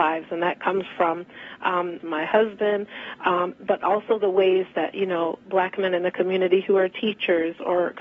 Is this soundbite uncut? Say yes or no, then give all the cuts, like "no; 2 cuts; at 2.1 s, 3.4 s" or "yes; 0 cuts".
no; 1 cut; at 2.0 s